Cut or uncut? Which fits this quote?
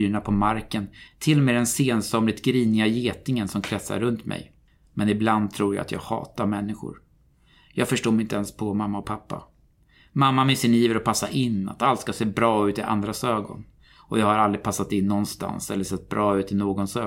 cut